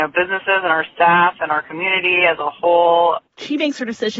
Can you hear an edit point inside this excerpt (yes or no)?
yes